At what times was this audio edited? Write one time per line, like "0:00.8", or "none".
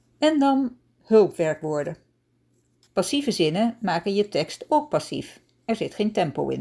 0:02.9